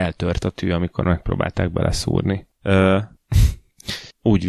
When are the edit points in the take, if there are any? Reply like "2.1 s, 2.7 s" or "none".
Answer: 2.5 s